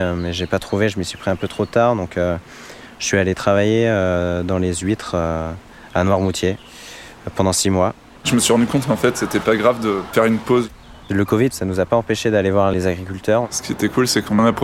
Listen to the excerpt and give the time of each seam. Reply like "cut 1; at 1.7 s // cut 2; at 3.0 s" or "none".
cut 1; at 8.2 s